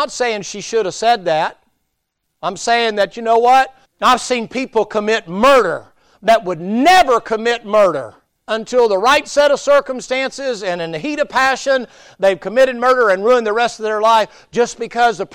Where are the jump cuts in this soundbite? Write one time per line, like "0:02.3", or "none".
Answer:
0:03.8
0:08.4

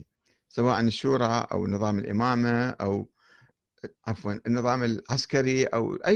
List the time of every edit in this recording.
0:04.0

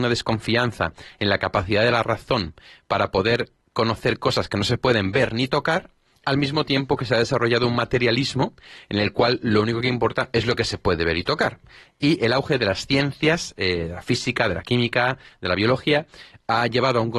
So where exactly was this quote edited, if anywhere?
none

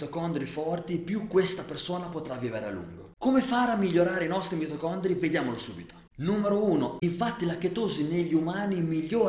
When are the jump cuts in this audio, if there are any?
0:07.0

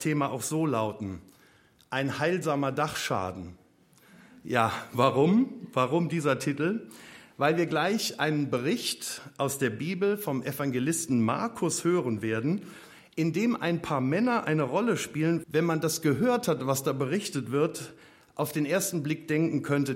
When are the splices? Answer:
0:15.4

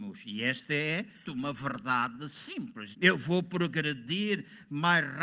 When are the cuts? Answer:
0:01.2
0:02.9

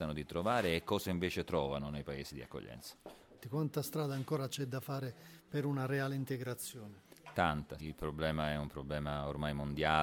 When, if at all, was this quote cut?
0:03.4
0:07.8

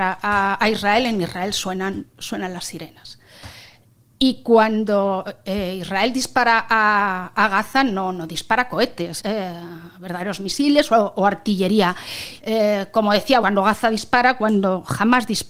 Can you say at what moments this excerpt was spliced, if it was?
0:09.2
0:12.4
0:13.4

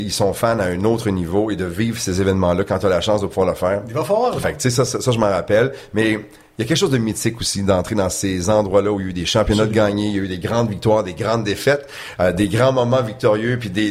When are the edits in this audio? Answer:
0:04.4

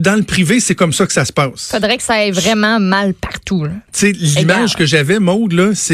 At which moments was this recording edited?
0:03.9

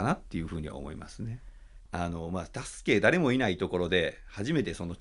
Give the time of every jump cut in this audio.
0:01.9

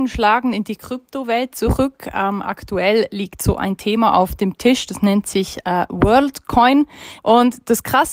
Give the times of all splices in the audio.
0:07.2

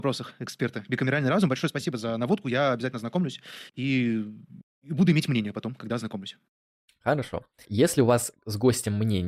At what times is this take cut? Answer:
0:07.6

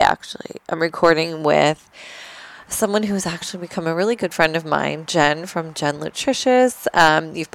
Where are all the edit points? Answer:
none

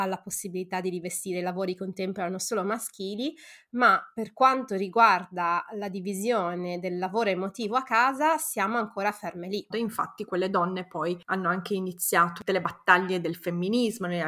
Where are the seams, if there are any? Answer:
0:09.7

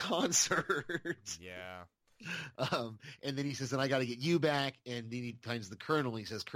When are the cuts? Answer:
none

